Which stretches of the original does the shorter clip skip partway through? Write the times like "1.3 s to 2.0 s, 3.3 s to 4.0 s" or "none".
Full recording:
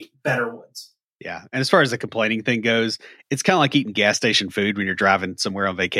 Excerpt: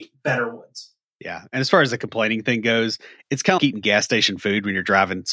3.6 s to 3.7 s